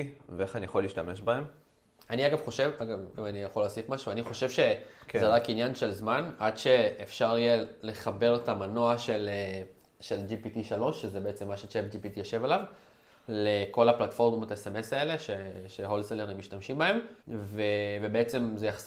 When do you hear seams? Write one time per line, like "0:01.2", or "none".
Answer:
0:02.0
0:17.2